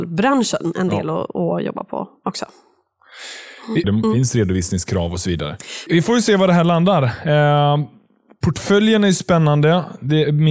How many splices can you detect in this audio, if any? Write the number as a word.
two